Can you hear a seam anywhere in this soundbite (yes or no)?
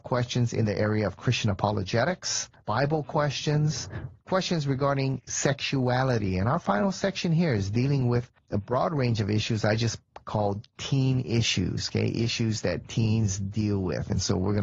yes